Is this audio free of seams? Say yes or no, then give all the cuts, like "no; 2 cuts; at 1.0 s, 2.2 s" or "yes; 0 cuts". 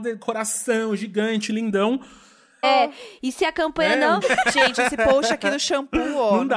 no; 2 cuts; at 2.6 s, 4.2 s